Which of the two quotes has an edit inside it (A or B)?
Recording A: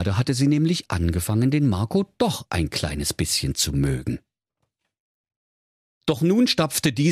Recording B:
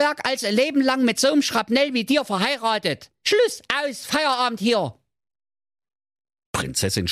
B